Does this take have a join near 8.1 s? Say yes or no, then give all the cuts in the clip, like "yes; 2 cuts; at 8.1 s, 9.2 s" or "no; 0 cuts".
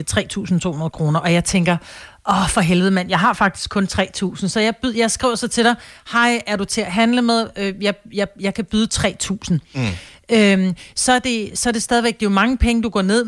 no; 0 cuts